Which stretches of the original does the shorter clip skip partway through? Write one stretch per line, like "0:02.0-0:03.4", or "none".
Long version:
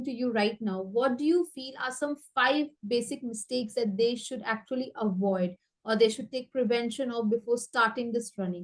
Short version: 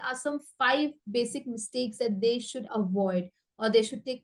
0:04.4-0:04.9

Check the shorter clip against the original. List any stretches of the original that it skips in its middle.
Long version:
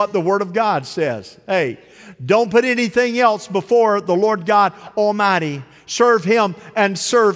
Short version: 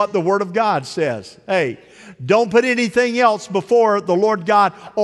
none

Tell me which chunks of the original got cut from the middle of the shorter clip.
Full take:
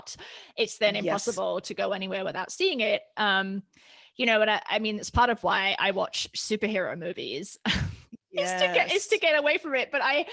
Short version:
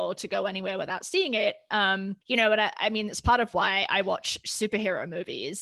0:03.7-0:04.1

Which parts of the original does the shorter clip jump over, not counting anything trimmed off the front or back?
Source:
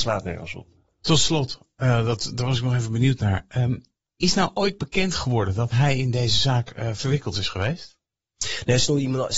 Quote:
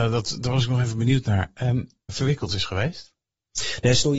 0:04.0-0:06.9

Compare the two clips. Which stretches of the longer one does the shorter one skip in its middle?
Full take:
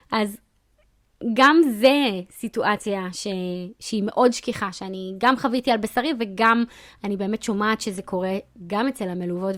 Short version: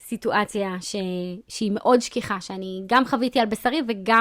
none

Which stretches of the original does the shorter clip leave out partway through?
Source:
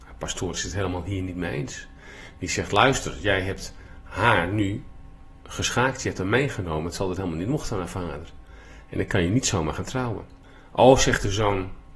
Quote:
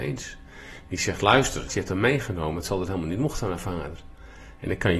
0:03.2-0:06.0

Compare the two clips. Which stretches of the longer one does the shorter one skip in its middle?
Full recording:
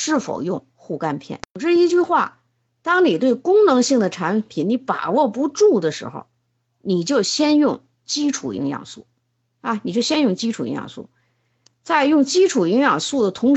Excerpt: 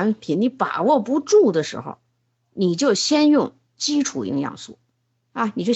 none

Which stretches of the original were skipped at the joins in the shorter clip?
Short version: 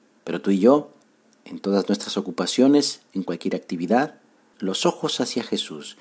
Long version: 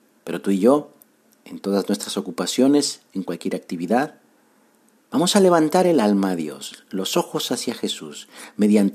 0:04.5-0:06.8

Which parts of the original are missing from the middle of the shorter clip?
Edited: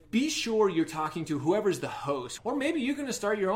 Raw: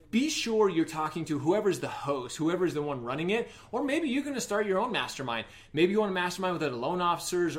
0:02.4-0:03.7

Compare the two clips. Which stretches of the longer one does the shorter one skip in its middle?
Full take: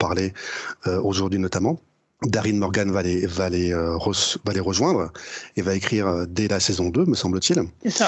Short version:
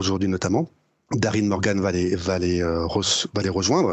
none

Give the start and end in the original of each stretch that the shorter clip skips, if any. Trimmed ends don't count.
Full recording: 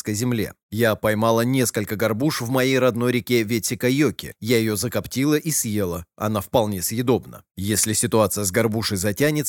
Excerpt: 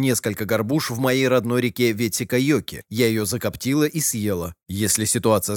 0:06.1-0:07.5

